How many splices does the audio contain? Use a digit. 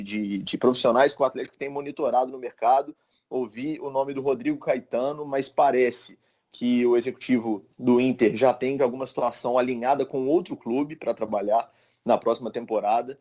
2